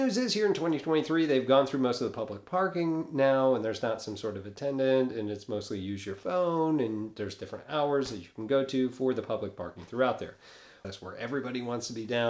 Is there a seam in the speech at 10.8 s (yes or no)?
yes